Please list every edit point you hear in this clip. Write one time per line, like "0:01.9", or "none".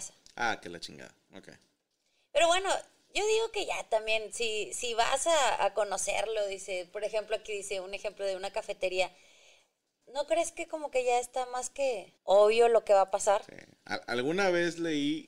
0:10.0
0:12.2

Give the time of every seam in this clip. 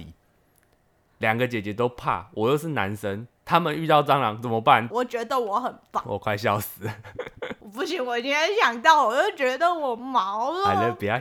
0:04.9

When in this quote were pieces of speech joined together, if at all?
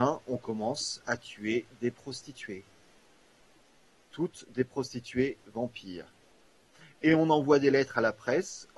none

